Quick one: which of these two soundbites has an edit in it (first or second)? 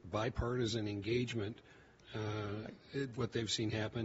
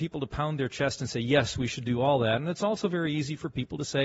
first